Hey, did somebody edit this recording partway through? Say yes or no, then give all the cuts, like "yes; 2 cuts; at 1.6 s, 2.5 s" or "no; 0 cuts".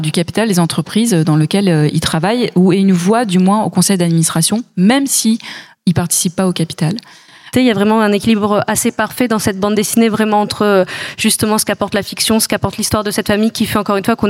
yes; 1 cut; at 7.5 s